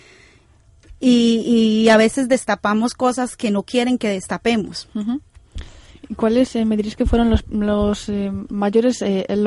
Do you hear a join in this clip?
no; 0 cuts

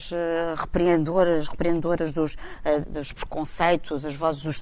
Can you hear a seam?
yes; 1 cut; at 2.8 s

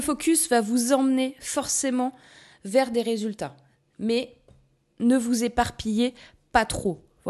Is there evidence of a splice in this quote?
no; 0 cuts

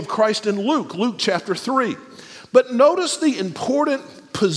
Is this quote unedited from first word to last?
yes; 0 cuts

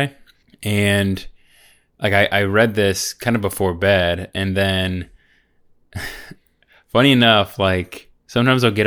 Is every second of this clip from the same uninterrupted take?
yes; 0 cuts

